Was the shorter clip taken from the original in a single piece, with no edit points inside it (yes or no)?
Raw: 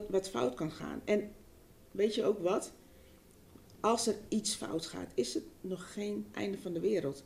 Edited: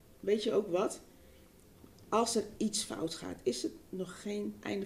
yes